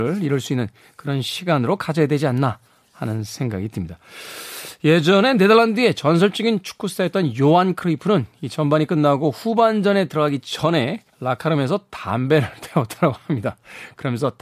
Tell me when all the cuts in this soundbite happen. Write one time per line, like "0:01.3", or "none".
0:11.1

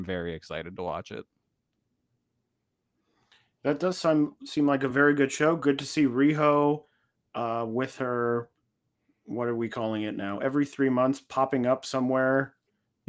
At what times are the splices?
none

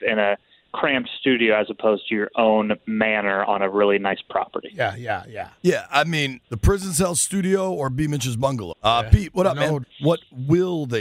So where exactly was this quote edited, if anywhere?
0:06.4
0:08.7
0:09.8

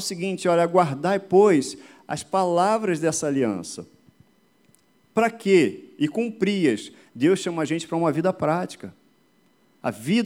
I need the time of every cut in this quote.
0:07.1

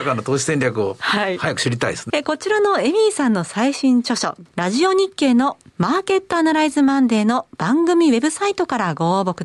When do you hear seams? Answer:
0:02.1
0:04.5

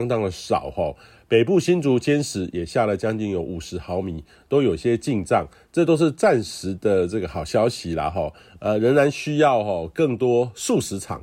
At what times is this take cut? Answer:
none

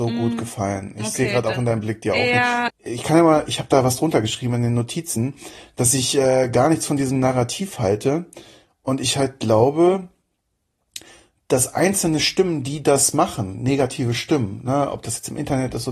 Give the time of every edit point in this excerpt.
0:02.7

